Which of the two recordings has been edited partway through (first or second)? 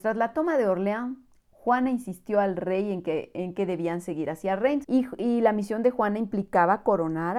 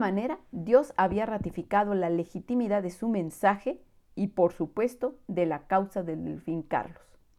first